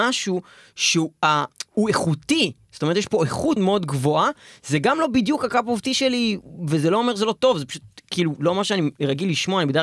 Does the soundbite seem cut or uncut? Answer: cut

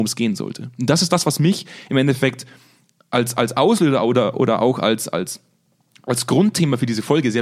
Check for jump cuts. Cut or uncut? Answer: uncut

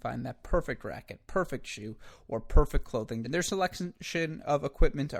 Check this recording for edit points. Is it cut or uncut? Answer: cut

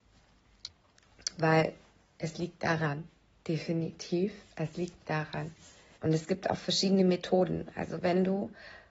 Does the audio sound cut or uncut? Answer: cut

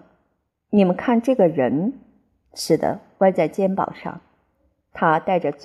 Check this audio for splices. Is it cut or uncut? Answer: uncut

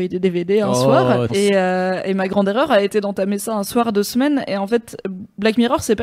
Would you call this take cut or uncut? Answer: cut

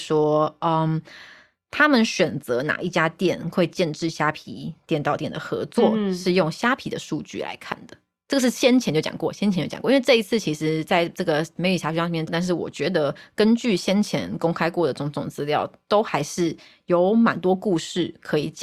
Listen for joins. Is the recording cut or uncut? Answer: cut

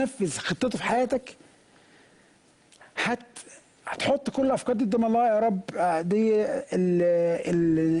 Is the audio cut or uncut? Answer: uncut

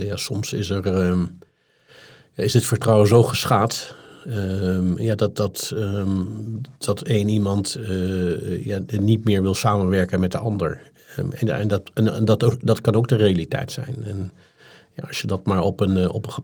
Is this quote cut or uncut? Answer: uncut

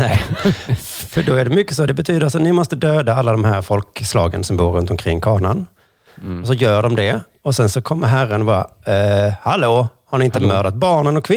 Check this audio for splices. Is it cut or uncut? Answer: uncut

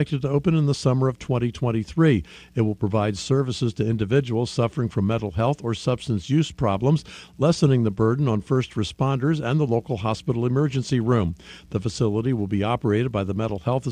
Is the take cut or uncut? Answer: uncut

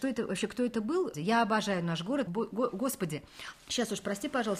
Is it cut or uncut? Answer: cut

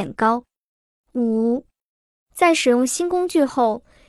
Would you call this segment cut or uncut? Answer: uncut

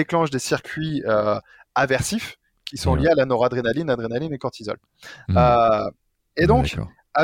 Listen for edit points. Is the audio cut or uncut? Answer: uncut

